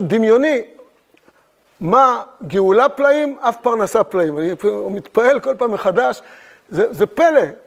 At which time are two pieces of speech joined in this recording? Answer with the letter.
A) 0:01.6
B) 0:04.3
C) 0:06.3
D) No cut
D